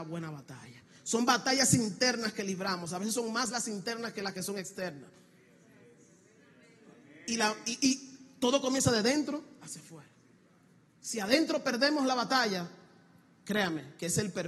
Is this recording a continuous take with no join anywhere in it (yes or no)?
yes